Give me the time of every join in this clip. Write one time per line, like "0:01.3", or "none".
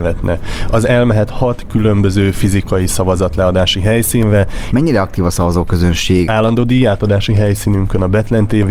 0:04.7
0:06.3